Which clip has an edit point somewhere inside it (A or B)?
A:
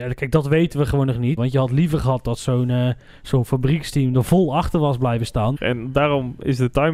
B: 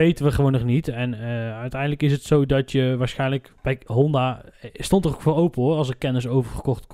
A